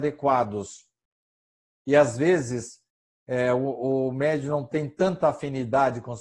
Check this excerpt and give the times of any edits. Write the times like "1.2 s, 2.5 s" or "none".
none